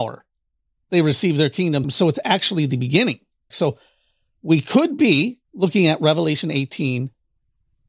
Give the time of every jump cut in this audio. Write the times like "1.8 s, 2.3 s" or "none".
1.8 s, 3.5 s, 5.4 s